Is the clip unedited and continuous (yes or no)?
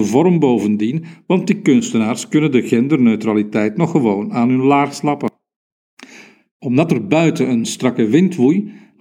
yes